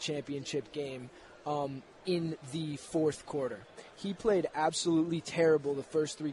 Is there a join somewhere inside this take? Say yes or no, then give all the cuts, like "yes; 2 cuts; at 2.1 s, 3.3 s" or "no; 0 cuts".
no; 0 cuts